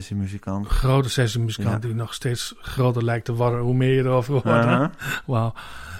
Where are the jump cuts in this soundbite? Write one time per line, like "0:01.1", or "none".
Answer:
none